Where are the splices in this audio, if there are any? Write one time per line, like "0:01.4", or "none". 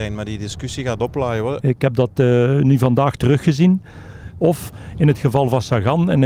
0:01.6
0:04.4